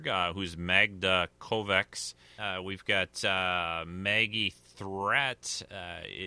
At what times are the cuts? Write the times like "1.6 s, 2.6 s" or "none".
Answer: 2.4 s